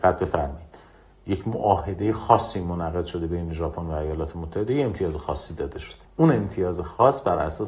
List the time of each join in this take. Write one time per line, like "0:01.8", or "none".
0:06.1